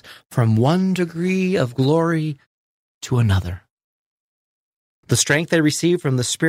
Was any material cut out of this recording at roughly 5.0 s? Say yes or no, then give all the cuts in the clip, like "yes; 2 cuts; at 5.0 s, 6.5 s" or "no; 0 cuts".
yes; 1 cut; at 5.0 s